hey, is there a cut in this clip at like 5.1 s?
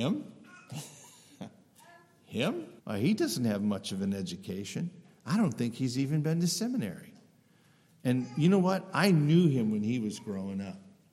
no; 1 cut; at 2.8 s

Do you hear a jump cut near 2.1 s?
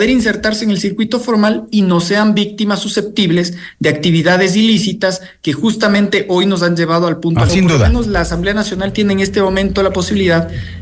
no; 1 cut; at 7.5 s

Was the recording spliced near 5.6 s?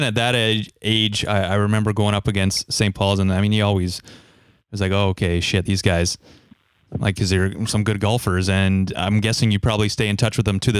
no; 0 cuts

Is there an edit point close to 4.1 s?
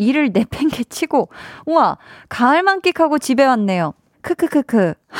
yes; 1 cut; at 4.1 s

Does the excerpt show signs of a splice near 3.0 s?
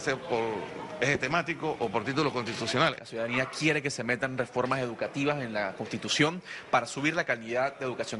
no; 0 cuts

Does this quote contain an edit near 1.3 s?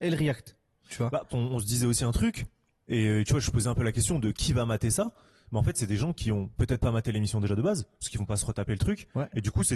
yes; 1 cut; at 1.3 s

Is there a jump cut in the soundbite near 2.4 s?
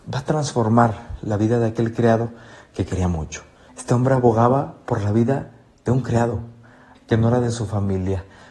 no; 2 cuts; at 3.7 s, 6.9 s

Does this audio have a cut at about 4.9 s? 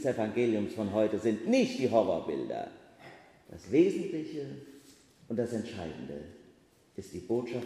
no; 1 cut; at 3.4 s

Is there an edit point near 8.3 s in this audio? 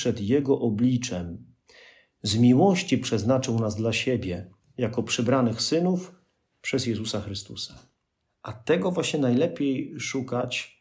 yes; 1 cut; at 8.3 s

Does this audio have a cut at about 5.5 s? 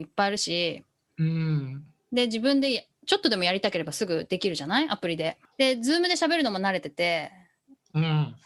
yes; 1 cut; at 5.5 s

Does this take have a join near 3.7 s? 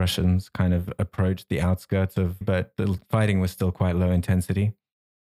no; 1 cut; at 2.4 s

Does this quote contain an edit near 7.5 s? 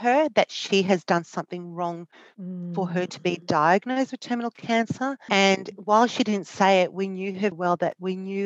yes; 2 cuts; at 5.3 s, 7.5 s

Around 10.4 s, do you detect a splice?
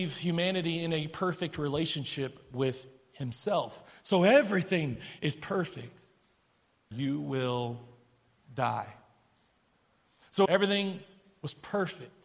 yes; 2 cuts; at 6.9 s, 10.4 s

